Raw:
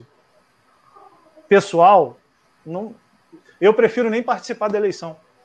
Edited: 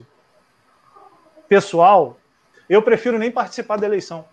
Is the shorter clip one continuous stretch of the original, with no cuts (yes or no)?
no